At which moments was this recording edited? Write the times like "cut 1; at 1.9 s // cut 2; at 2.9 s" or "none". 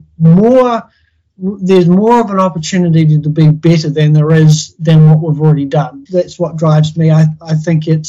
cut 1; at 6.1 s